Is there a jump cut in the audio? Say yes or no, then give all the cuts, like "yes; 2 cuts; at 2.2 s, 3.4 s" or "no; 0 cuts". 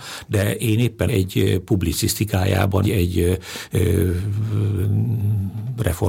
yes; 2 cuts; at 1.1 s, 2.8 s